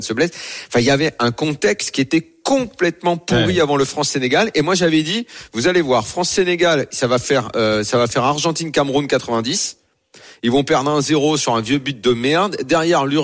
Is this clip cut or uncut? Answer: uncut